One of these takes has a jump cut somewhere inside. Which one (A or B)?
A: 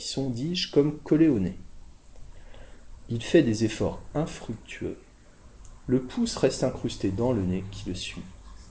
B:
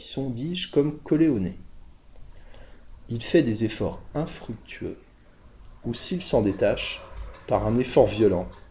B